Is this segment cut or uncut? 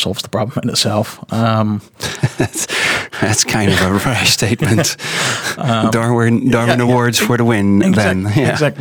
uncut